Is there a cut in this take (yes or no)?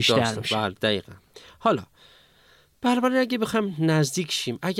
no